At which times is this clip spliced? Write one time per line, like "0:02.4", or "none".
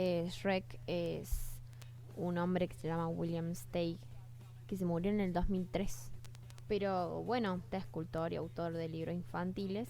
0:06.7
0:07.7